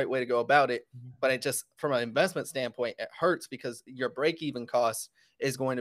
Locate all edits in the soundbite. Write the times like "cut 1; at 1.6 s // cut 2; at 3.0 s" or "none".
none